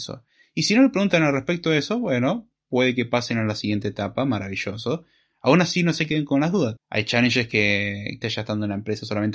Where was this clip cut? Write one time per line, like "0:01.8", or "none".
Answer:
0:06.8
0:08.2